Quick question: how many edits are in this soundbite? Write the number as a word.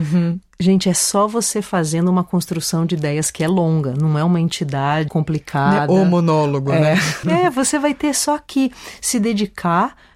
two